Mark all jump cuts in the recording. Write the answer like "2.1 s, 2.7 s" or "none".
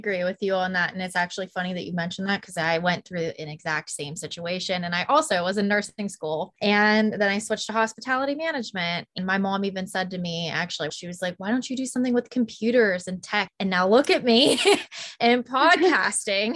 10.9 s, 13.5 s